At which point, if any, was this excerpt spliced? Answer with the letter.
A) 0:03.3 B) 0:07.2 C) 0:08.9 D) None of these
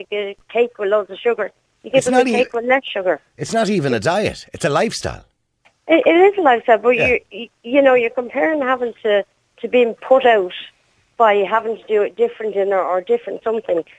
D